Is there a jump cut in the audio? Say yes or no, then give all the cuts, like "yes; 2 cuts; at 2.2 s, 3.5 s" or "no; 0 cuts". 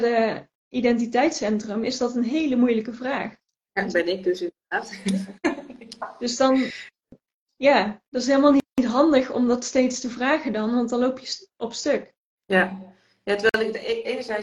no; 0 cuts